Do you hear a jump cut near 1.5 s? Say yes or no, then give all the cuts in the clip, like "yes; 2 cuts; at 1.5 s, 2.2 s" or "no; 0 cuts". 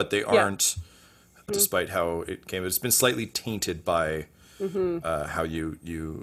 yes; 1 cut; at 1.5 s